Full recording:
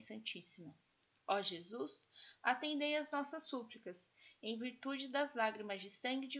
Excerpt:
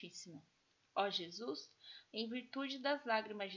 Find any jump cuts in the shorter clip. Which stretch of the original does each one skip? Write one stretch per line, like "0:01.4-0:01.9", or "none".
0:02.4-0:04.4